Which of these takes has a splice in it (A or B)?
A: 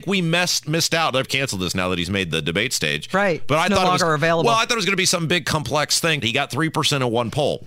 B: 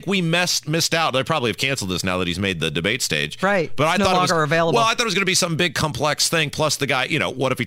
A